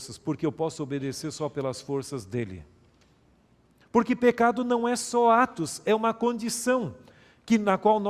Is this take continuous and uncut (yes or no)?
no